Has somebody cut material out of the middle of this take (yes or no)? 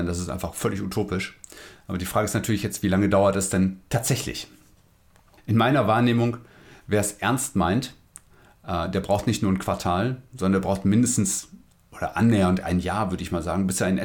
no